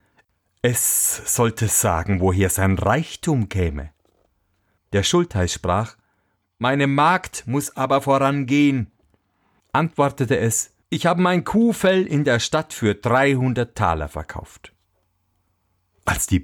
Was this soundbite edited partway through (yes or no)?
yes